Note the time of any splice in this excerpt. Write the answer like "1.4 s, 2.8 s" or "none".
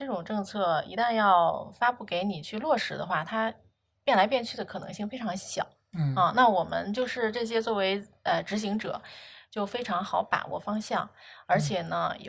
none